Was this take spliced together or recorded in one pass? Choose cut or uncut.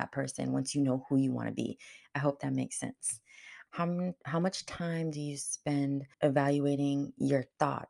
cut